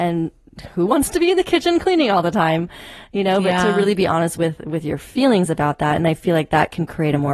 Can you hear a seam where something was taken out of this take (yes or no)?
no